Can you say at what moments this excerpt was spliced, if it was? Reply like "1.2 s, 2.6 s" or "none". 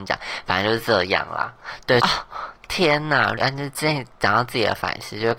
2.0 s, 3.4 s